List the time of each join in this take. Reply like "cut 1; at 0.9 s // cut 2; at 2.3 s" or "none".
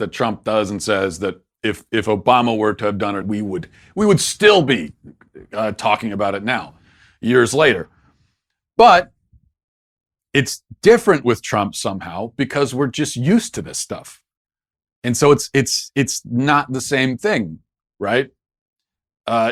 cut 1; at 3.2 s